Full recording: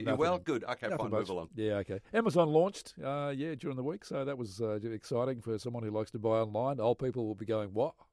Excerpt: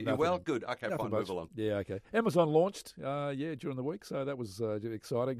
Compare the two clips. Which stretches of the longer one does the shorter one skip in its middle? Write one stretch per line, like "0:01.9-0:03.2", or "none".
none